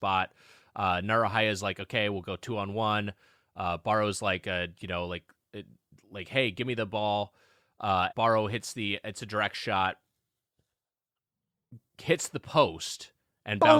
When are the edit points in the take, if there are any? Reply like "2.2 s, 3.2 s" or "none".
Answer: 8.1 s